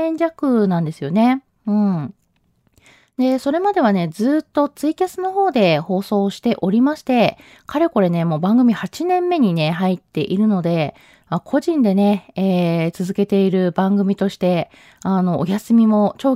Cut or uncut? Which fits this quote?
uncut